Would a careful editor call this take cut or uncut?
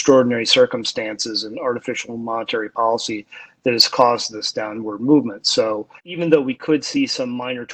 cut